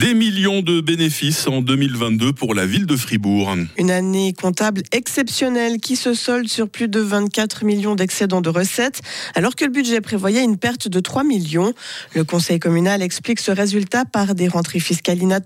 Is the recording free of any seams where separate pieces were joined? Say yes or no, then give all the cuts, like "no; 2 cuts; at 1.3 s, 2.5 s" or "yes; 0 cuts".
yes; 0 cuts